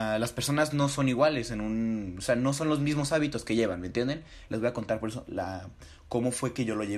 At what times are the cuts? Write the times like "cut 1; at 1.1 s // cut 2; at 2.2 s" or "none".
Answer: cut 1; at 4.5 s